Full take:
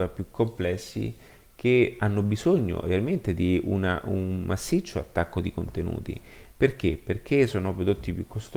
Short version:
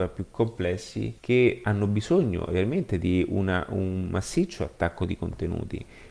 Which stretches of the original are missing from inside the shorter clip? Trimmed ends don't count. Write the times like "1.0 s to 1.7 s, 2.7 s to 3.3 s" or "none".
1.2 s to 1.5 s